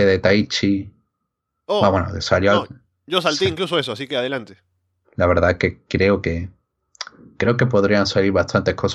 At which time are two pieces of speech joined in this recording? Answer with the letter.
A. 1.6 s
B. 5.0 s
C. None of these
B